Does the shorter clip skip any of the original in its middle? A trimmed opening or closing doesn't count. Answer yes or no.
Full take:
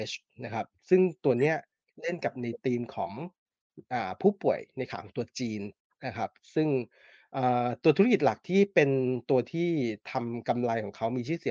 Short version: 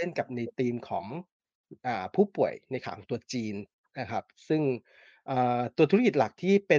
no